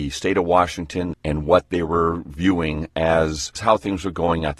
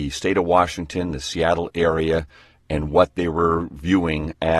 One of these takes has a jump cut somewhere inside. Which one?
first; 1 cut; at 1.1 s

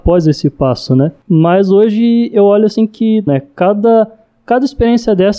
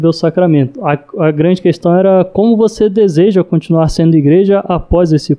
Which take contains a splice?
first; 1 cut; at 3.3 s

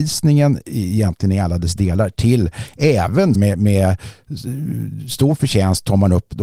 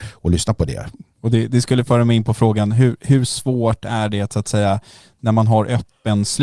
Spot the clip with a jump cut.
first; 1 cut; at 3.3 s

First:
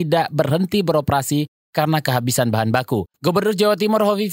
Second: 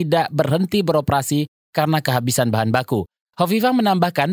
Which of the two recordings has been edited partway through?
first; 1 cut; at 3.1 s

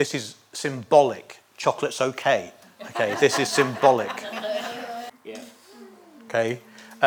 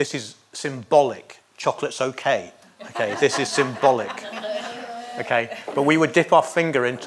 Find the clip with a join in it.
first; 1 cut; at 5.1 s

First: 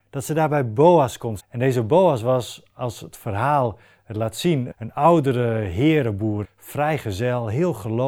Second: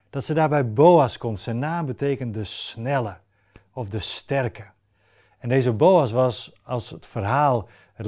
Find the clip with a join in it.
first; 3 cuts; at 1.4 s, 4.7 s, 6.4 s

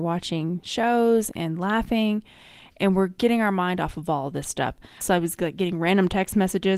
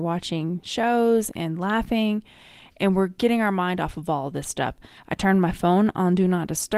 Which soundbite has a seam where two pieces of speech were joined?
first; 1 cut; at 5.0 s

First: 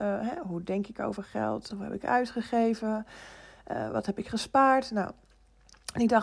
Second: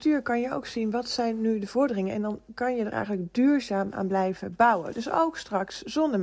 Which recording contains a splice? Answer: first; 1 cut; at 1.7 s

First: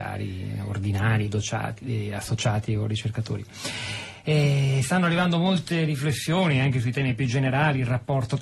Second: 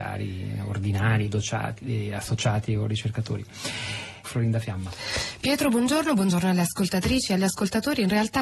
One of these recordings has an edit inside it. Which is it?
second; 1 cut; at 4.2 s

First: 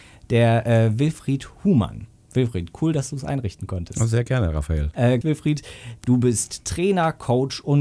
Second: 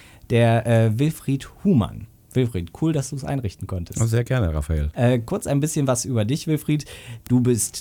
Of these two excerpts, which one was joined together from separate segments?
first; 1 cut; at 5.2 s

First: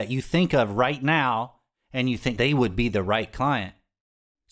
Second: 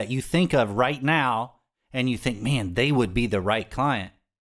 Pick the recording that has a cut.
first; 1 cut; at 2.4 s

